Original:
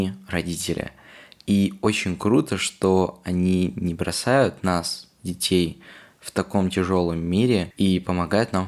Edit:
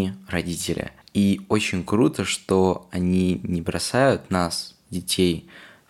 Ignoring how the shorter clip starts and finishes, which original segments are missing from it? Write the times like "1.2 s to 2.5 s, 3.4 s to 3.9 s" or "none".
1.0 s to 1.3 s